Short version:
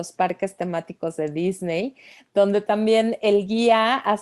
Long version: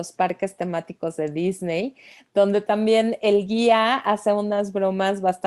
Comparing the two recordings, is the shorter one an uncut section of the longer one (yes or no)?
yes